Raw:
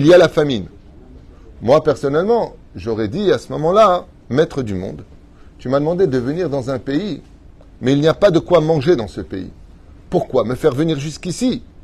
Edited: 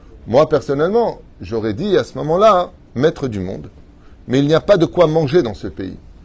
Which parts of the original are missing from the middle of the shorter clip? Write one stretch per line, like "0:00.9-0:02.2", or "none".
0:05.5-0:07.7